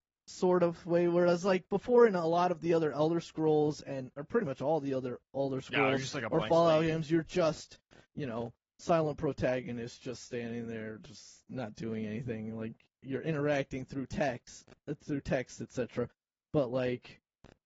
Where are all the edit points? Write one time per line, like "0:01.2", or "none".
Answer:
none